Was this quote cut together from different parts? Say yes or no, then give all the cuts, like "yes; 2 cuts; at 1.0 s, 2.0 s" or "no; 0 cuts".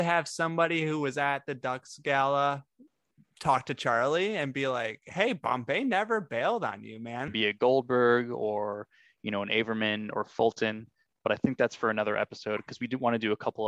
yes; 1 cut; at 7.3 s